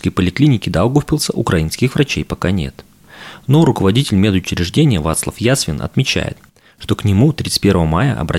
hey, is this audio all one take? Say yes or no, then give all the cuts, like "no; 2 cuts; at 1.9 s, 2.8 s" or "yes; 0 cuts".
yes; 0 cuts